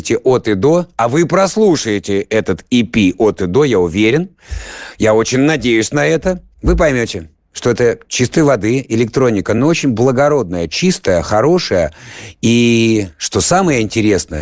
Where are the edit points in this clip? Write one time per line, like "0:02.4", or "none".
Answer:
none